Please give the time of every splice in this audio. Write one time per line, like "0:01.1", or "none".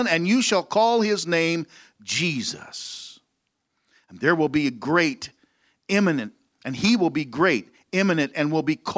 none